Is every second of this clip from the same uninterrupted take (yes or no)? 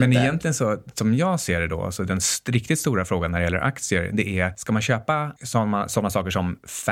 yes